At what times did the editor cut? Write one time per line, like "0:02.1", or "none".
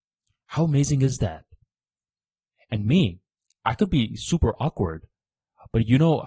none